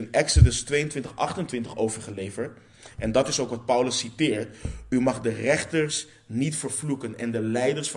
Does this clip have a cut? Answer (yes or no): no